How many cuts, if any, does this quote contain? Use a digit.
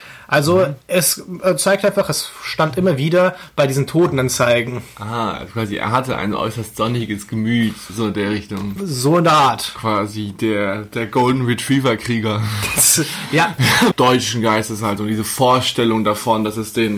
1